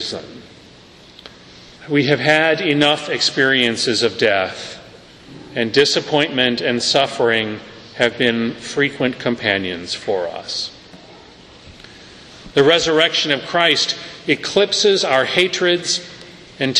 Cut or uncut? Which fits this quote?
cut